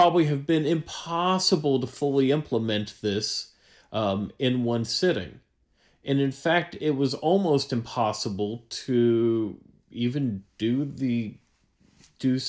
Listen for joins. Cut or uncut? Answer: uncut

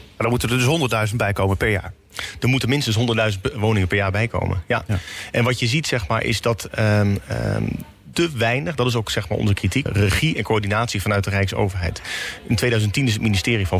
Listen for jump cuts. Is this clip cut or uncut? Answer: cut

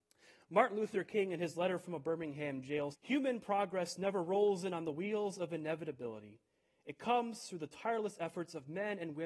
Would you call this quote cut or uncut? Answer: cut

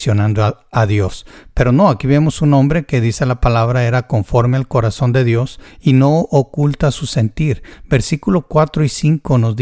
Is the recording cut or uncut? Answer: uncut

